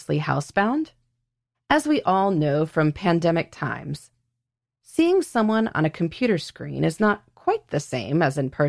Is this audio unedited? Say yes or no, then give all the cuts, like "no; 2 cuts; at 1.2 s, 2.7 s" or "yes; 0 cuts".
no; 1 cut; at 1.5 s